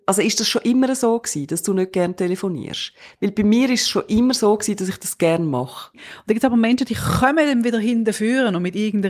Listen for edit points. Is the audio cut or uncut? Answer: cut